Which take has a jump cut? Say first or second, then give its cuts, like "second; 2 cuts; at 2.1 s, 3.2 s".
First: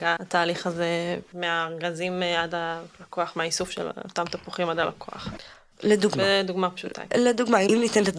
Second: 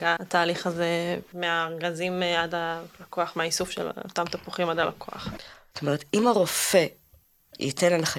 second; 1 cut; at 5.7 s